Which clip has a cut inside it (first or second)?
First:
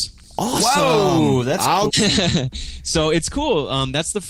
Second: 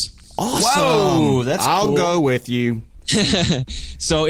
first